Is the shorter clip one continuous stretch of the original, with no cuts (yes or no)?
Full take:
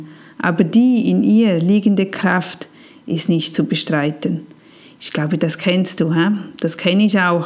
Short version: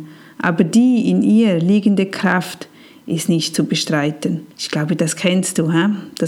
no